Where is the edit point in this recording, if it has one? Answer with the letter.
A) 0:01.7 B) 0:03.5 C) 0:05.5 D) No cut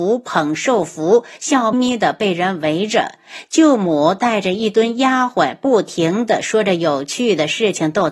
A